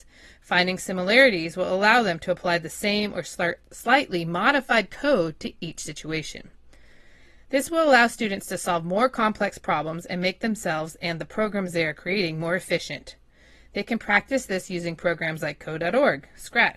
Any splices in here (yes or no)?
no